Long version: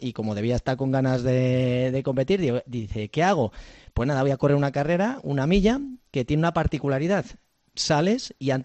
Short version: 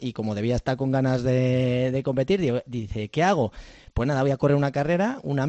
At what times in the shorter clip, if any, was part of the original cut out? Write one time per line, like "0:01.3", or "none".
none

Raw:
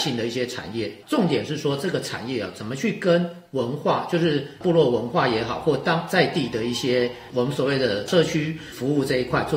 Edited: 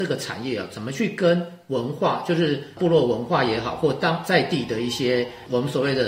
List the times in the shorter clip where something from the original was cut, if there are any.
none

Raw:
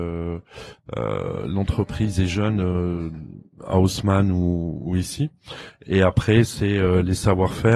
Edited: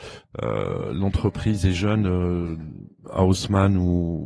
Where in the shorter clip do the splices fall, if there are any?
none

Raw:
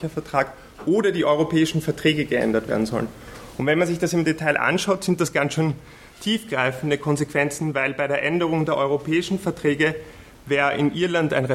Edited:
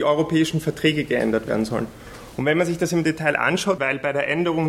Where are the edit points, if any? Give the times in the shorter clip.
0:03.8

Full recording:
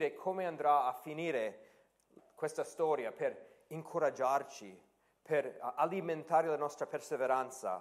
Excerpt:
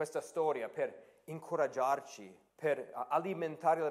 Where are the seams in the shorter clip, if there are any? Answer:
0:02.5

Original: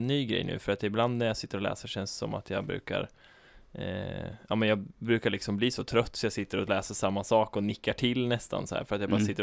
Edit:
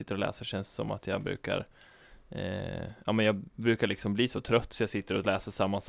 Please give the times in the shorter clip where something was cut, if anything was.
none

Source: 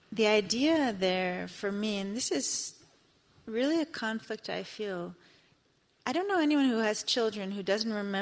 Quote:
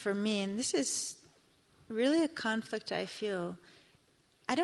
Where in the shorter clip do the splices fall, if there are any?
none

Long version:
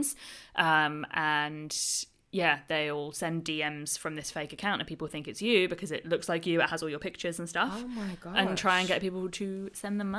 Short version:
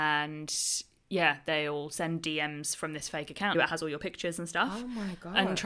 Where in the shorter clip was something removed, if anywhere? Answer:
0:03.5

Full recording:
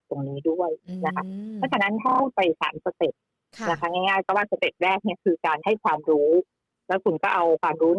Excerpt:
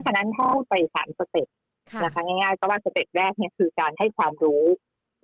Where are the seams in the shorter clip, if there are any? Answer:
none

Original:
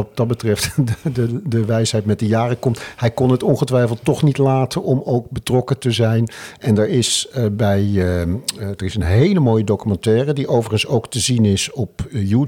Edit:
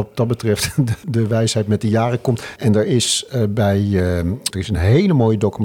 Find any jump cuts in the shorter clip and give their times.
0:01.0
0:02.6
0:04.5

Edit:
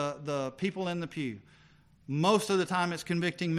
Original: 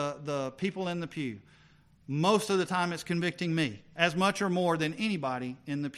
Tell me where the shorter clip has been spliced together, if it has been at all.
none

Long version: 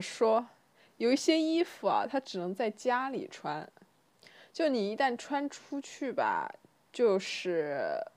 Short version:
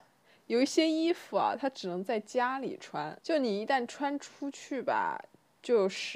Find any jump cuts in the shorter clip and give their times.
0:03.2

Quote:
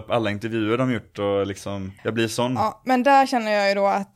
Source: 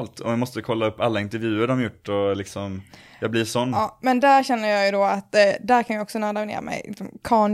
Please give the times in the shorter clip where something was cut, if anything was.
0:02.0

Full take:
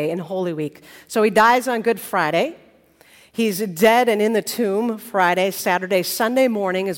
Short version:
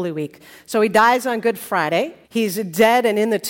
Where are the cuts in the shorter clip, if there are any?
0:02.2

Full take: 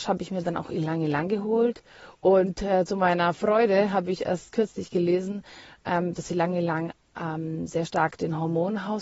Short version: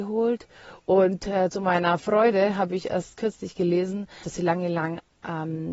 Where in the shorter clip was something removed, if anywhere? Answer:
0:04.2

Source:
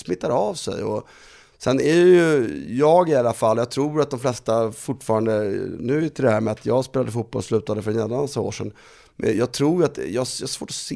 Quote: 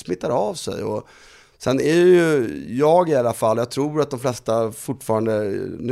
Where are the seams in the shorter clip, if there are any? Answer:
none

